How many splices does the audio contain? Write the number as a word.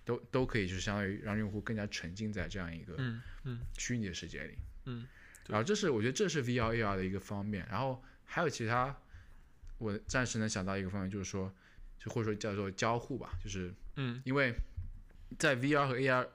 zero